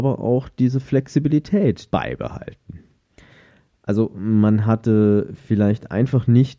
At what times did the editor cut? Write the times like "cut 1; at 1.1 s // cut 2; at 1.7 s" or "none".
cut 1; at 1.9 s